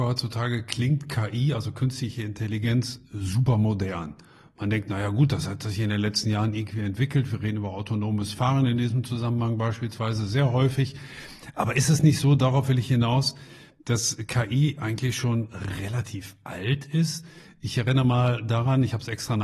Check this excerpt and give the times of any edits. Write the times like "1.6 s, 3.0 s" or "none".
none